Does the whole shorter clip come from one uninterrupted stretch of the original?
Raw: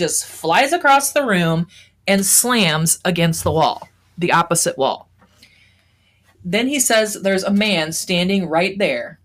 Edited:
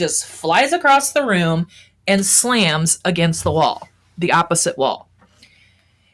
yes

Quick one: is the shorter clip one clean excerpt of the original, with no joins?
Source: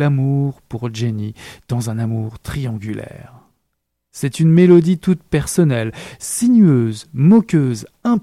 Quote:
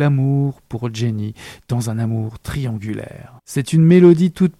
no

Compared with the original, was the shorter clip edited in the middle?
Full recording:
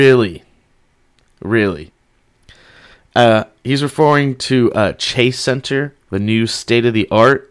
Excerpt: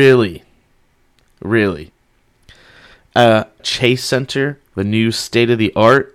yes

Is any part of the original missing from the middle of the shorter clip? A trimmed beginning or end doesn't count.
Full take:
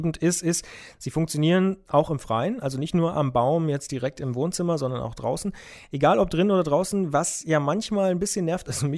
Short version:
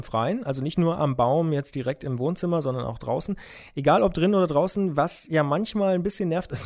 no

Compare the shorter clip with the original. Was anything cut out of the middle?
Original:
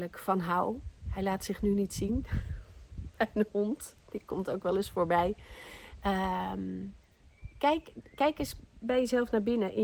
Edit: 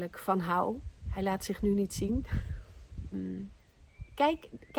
yes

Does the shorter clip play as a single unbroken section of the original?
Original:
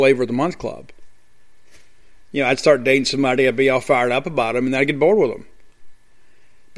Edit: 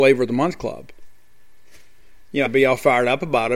no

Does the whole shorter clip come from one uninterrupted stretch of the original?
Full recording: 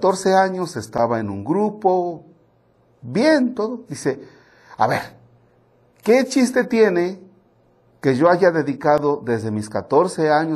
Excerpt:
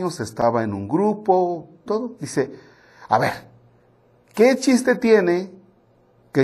no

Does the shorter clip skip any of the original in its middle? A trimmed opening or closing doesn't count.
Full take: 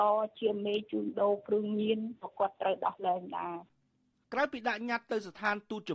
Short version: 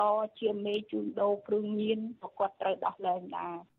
no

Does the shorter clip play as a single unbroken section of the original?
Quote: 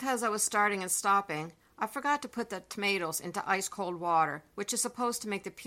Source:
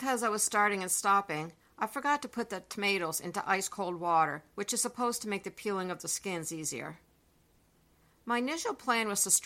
yes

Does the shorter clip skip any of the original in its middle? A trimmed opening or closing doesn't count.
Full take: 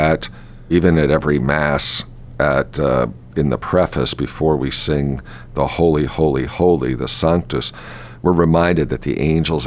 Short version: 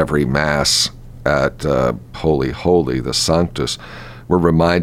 yes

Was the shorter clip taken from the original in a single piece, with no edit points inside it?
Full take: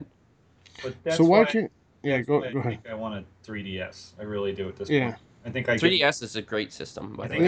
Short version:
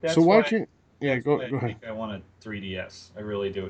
yes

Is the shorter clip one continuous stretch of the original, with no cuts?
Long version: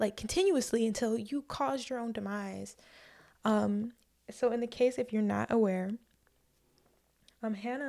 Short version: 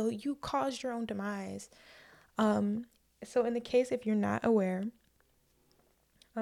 yes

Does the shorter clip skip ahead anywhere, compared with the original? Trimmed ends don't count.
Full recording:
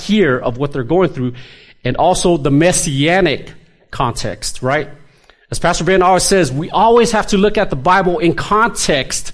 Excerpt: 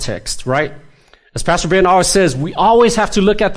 no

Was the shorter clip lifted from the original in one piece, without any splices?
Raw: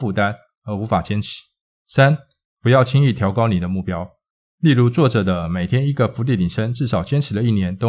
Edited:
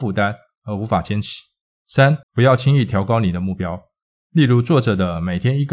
no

